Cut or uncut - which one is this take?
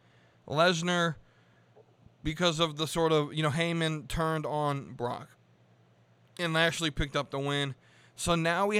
uncut